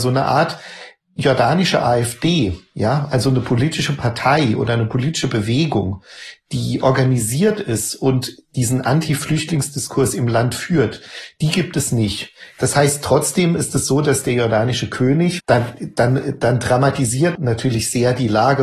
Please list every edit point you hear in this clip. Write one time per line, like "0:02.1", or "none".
0:15.4
0:17.4